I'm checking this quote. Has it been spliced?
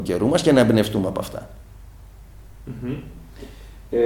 no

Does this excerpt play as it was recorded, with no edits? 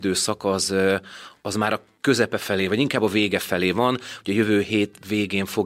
yes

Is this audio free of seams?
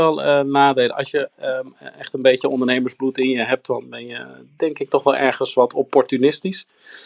yes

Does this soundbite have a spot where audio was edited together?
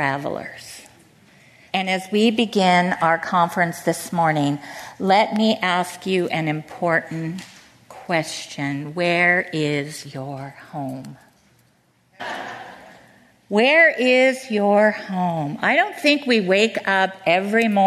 yes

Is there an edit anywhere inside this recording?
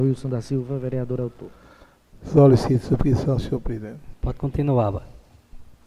yes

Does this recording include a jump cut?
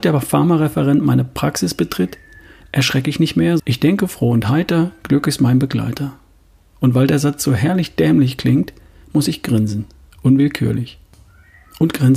yes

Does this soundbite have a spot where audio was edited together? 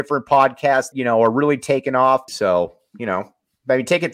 yes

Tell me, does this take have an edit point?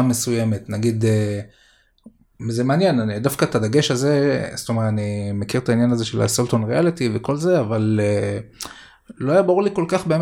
no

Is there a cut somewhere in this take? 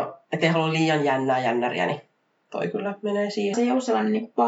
yes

